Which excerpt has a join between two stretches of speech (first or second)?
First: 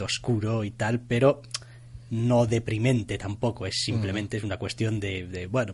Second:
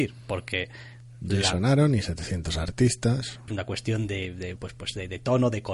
second